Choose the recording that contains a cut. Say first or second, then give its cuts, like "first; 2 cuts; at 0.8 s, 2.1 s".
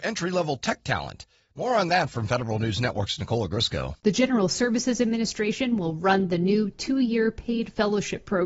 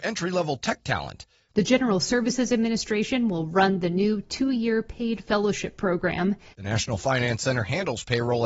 second; 2 cuts; at 1.5 s, 6.5 s